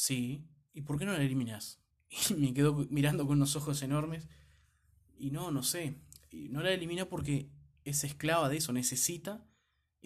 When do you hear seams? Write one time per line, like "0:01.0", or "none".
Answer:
0:01.9